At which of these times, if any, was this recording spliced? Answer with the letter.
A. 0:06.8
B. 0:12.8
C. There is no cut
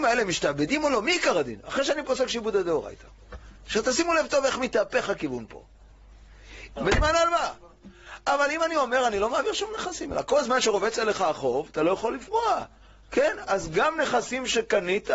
A